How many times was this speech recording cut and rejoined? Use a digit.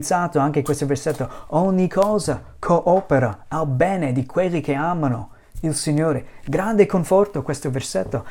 0